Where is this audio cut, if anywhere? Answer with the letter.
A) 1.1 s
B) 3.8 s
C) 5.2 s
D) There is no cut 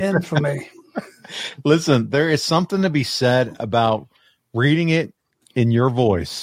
D